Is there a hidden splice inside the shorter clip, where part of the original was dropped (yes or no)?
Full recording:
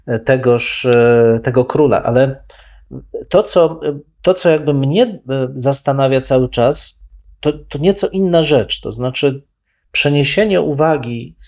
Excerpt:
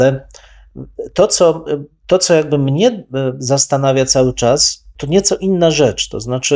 yes